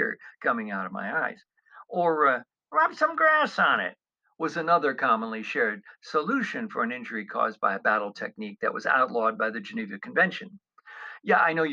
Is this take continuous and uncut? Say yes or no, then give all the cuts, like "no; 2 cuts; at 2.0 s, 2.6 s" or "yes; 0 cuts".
yes; 0 cuts